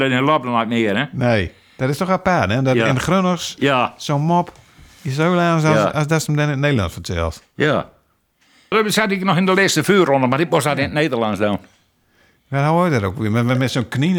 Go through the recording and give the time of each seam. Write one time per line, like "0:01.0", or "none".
0:08.7